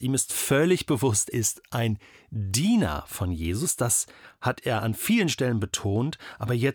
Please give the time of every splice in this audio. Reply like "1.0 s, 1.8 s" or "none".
1.3 s